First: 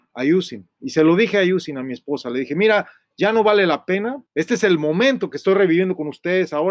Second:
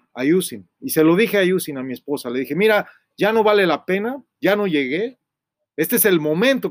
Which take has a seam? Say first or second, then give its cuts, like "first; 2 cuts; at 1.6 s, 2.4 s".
first; 1 cut; at 4.3 s